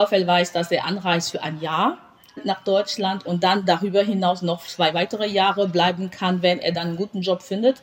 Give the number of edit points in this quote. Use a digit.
0